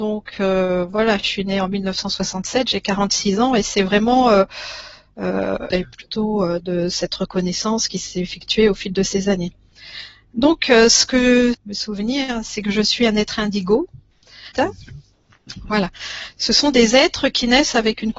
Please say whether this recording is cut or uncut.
cut